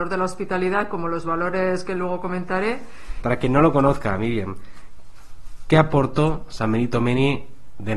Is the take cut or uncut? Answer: cut